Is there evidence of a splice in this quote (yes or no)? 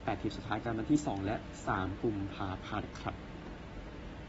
yes